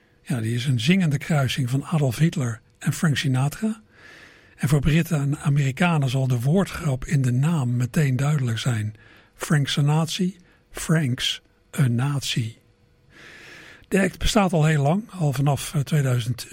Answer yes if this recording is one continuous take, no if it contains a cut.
yes